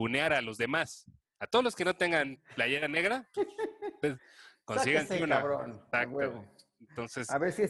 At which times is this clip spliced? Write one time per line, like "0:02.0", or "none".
none